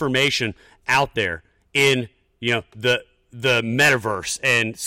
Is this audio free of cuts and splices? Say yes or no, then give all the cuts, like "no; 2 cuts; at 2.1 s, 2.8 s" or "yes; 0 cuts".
yes; 0 cuts